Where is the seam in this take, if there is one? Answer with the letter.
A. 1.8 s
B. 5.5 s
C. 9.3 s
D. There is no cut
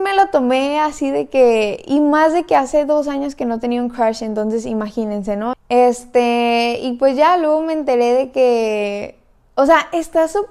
B